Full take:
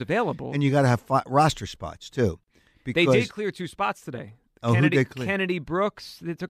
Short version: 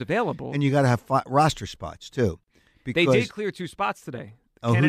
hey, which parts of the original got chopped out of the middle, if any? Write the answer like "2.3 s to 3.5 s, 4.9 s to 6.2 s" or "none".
none